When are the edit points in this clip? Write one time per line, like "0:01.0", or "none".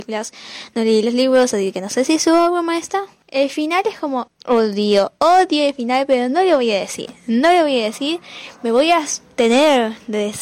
0:03.2
0:04.3